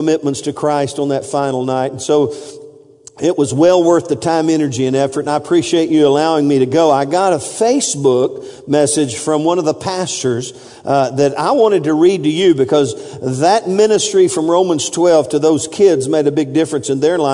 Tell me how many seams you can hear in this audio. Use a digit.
0